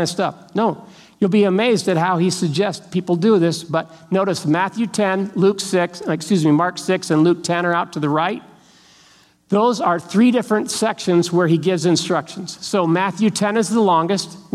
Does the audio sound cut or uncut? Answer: uncut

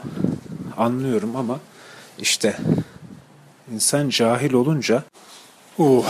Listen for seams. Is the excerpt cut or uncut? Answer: uncut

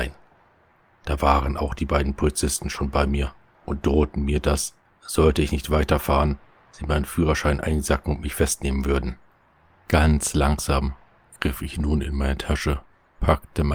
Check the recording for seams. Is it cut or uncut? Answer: uncut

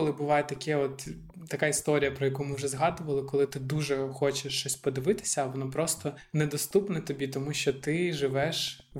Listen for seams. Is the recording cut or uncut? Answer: uncut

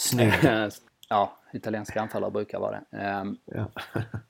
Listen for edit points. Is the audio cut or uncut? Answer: cut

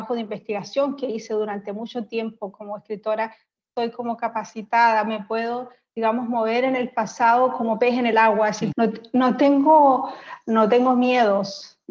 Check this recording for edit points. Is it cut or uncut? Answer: cut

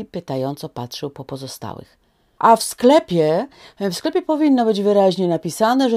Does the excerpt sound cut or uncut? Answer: cut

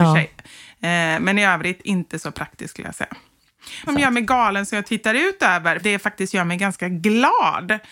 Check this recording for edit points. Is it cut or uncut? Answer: cut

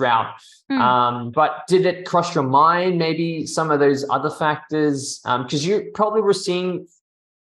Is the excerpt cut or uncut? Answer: cut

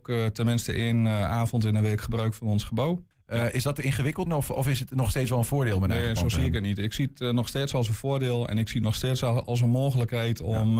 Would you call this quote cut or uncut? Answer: cut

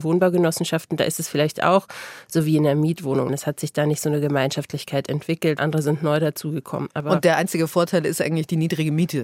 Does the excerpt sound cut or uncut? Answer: cut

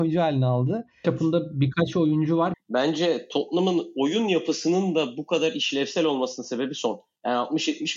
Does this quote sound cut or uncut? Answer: cut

